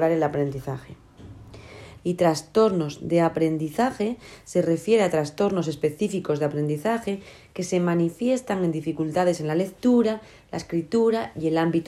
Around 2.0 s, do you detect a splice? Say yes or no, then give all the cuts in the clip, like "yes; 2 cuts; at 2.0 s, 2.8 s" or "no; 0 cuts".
yes; 1 cut; at 2.0 s